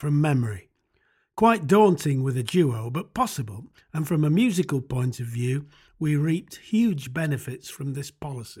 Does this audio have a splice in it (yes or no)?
no